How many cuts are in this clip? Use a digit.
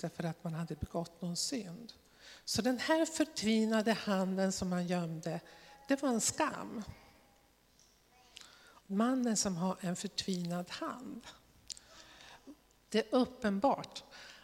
2